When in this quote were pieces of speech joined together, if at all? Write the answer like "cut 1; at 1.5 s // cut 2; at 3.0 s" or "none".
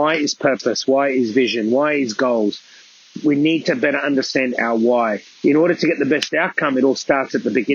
none

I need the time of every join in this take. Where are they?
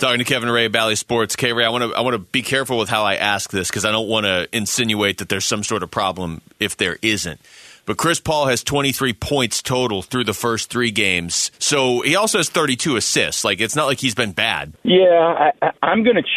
cut 1; at 11.5 s // cut 2; at 14.7 s

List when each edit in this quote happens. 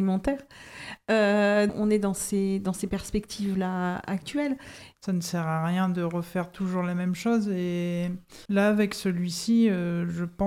cut 1; at 1.7 s // cut 2; at 4.9 s // cut 3; at 8.5 s

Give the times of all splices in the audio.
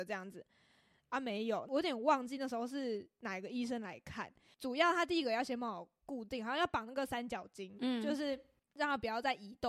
none

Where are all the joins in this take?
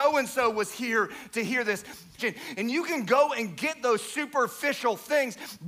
cut 1; at 2.2 s

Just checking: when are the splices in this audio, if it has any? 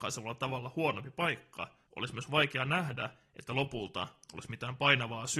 cut 1; at 1.9 s

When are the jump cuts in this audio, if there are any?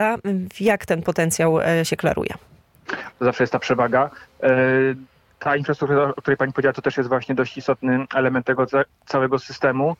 cut 1; at 1.8 s // cut 2; at 3.1 s

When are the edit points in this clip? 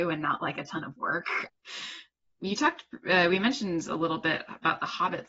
cut 1; at 1.5 s

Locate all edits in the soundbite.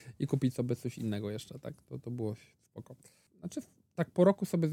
cut 1; at 3.3 s

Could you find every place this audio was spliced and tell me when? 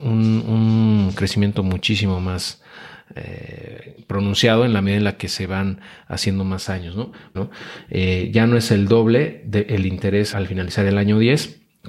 cut 1; at 7.3 s // cut 2; at 10.3 s

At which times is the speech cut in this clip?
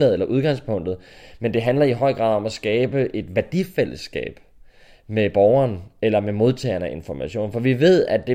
none

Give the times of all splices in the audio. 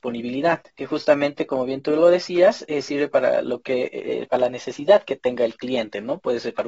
none

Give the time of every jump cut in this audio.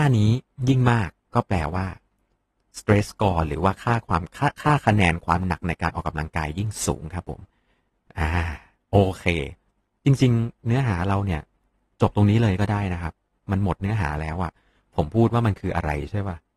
none

